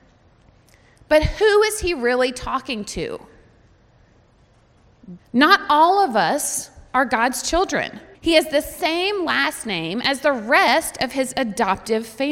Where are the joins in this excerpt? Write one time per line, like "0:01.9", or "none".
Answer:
0:05.2
0:08.1